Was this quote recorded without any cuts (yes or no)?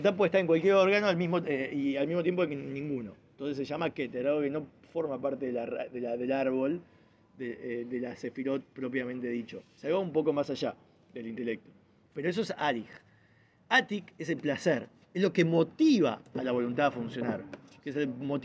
yes